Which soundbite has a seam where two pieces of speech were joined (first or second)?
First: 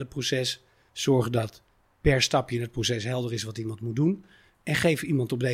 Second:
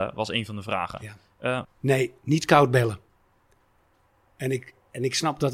second